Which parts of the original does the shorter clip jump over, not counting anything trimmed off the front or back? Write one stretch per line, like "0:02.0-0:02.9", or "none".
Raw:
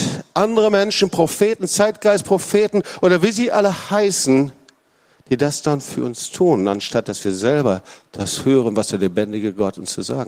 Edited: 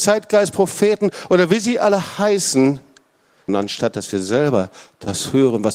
0:05.2-0:06.6

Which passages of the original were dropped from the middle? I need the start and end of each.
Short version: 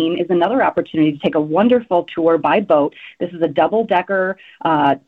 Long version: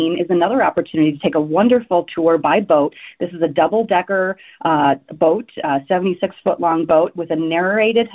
none

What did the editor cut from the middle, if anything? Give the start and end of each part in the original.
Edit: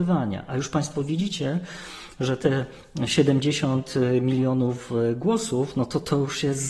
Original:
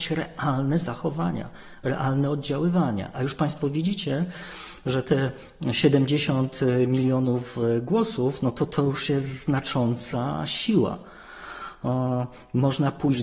none

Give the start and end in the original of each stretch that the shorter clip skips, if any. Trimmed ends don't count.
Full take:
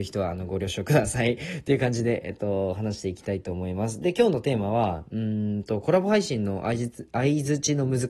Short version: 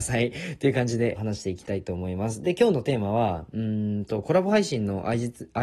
0:02.2-0:02.7

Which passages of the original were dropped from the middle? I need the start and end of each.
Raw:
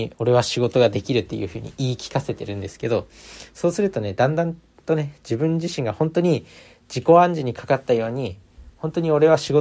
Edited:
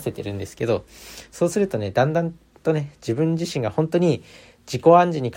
none

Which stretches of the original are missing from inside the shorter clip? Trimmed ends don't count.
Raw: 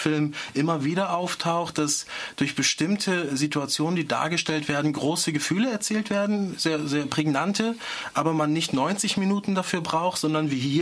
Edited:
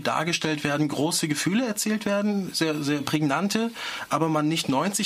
none

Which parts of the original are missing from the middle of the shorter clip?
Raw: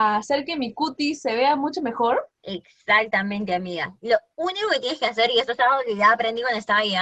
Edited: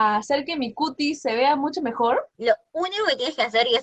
0:02.3-0:04.0

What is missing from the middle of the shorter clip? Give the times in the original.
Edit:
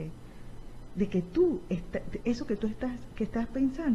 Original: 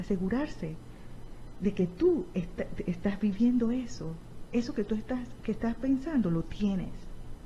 0:02.9-0:04.5

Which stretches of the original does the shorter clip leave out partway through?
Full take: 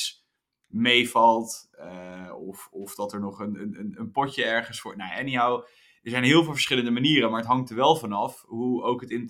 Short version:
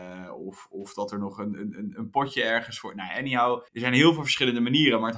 0:05.7-0:06.0

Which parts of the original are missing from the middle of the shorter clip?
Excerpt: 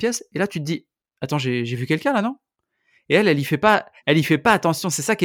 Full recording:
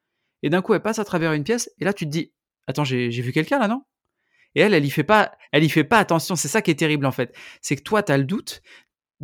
none

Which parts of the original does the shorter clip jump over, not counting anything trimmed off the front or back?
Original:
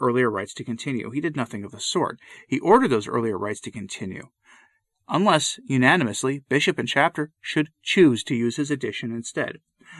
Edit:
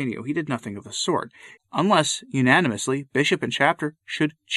0:02.4-0:04.9

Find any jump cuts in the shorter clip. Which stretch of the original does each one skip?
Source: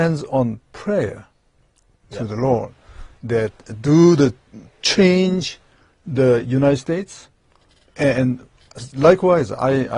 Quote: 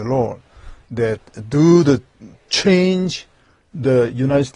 none

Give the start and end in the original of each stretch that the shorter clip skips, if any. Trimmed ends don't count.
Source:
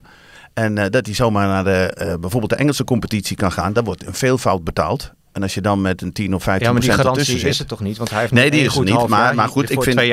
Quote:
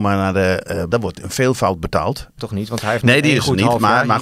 0:02.2-0:03.7
0:05.2-0:07.7

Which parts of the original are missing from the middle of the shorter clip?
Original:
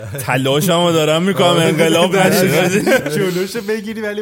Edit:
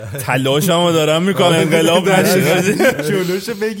0:01.5-0:01.6

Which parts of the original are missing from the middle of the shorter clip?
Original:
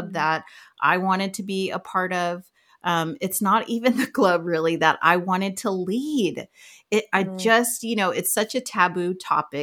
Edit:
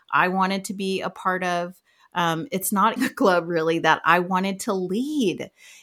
0:03.7-0:03.9

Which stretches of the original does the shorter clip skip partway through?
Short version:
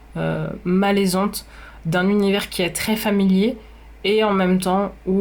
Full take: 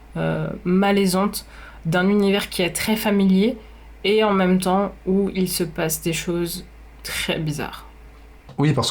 none

